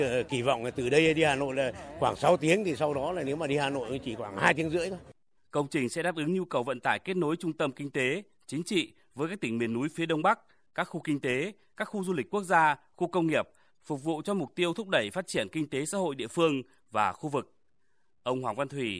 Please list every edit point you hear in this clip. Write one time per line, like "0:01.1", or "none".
0:05.4